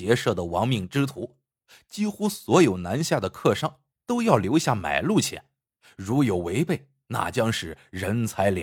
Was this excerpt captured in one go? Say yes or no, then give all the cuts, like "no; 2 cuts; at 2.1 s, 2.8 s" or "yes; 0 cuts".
yes; 0 cuts